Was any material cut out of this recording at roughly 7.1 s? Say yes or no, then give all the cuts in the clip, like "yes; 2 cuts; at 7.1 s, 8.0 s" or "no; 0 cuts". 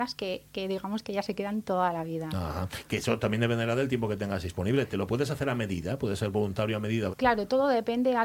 yes; 1 cut; at 7.1 s